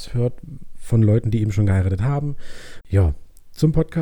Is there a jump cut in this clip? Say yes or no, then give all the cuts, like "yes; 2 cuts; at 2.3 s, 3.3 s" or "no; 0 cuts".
yes; 1 cut; at 2.8 s